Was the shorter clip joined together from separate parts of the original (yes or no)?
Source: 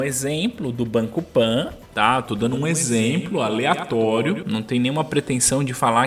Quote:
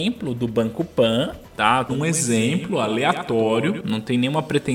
yes